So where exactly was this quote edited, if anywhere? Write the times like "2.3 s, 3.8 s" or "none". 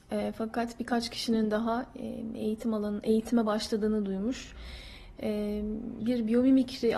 6.0 s